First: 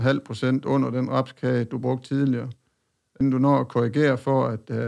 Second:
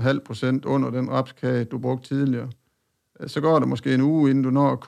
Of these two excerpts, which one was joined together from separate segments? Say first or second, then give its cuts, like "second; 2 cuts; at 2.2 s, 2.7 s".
first; 1 cut; at 3.2 s